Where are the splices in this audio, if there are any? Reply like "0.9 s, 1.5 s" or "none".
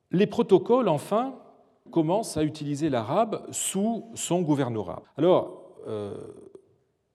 1.9 s, 5.0 s